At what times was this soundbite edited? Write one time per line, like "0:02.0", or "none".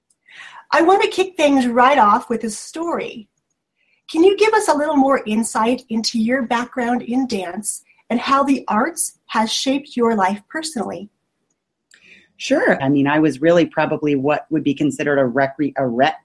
0:12.8